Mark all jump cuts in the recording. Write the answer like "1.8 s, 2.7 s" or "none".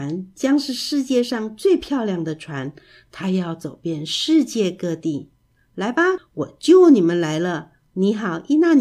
6.2 s, 7.9 s